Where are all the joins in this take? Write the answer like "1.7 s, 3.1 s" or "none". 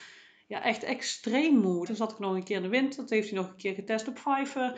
1.9 s

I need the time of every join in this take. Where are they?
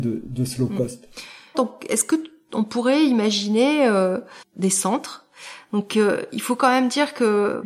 1.5 s, 4.4 s

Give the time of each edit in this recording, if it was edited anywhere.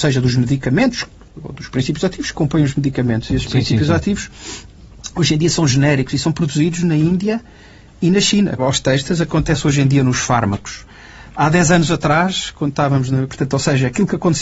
8.6 s, 13.3 s

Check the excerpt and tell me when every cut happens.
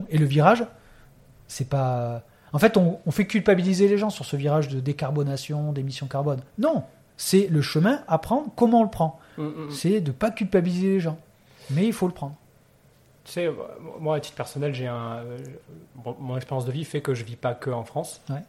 none

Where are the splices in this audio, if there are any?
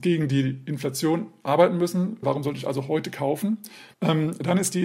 2.2 s, 3.9 s

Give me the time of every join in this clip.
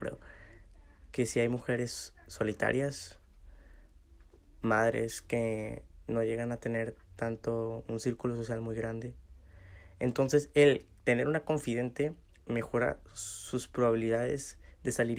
none

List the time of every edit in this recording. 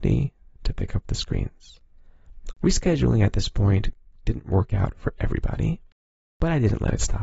2.5 s

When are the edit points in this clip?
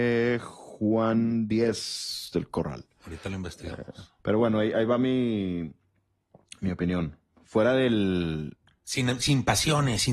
4.2 s

